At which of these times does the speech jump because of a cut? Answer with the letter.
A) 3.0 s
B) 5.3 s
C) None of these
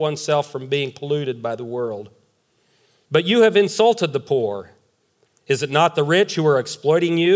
A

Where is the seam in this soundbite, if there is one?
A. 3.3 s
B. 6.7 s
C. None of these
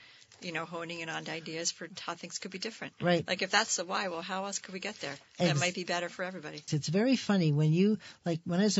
B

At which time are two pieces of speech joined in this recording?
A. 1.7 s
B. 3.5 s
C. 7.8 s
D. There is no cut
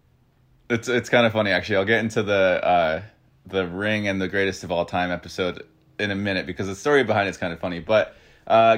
D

